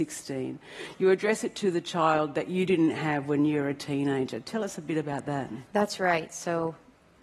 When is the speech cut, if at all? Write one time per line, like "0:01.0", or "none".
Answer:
none